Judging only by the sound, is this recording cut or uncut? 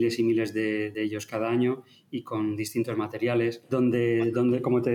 uncut